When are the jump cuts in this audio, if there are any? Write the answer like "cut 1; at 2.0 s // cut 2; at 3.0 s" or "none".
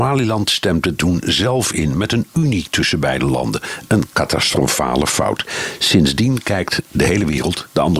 none